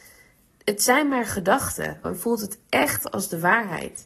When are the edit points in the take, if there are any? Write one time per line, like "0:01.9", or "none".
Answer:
0:02.0

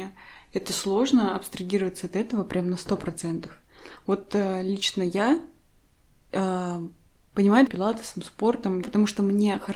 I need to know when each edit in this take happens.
0:07.7
0:08.8

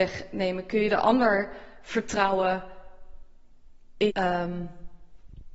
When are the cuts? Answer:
0:04.1

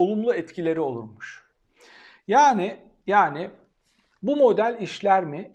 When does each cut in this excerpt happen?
none

